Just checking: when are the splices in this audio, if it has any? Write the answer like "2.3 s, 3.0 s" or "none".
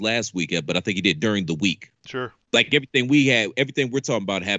none

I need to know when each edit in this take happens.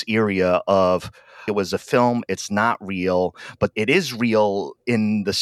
1.5 s, 3.7 s

